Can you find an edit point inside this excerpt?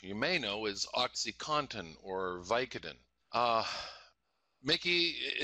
yes; 1 cut; at 3.2 s

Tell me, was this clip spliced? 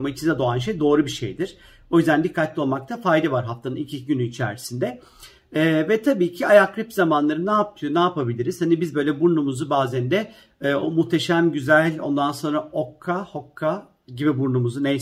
no; 0 cuts

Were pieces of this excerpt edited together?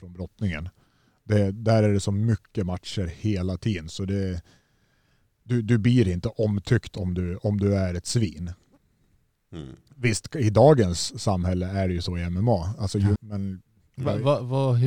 yes; 1 cut; at 13.2 s

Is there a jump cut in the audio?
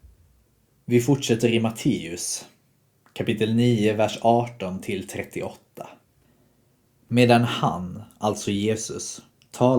no; 0 cuts

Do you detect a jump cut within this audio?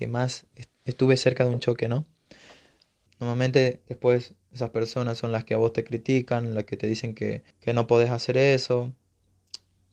yes; 2 cuts; at 3.1 s, 7.5 s

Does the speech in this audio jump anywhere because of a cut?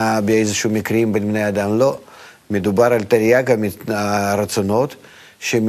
no; 0 cuts

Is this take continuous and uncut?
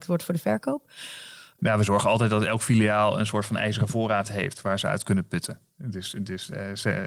no; 1 cut; at 1.6 s

